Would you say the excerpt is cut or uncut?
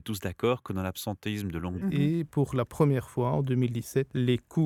cut